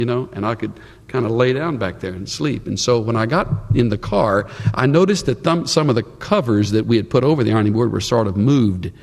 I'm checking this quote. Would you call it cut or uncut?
uncut